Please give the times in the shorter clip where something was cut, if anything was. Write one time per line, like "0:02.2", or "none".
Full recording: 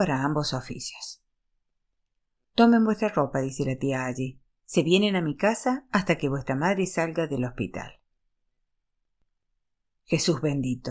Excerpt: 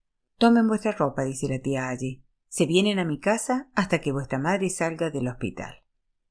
none